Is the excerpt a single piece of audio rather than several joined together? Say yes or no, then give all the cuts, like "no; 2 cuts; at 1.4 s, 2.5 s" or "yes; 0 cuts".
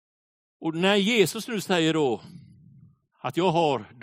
yes; 0 cuts